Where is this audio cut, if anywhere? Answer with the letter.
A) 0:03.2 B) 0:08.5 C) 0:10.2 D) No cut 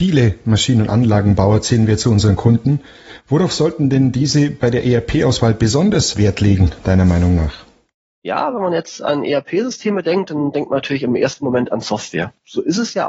D